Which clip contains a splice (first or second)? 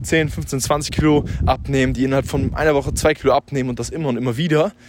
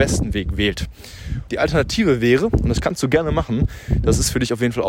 second